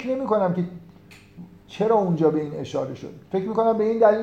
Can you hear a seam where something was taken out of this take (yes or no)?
yes